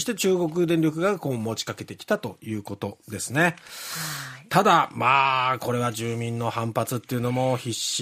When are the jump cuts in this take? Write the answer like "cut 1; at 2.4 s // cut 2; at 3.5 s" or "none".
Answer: none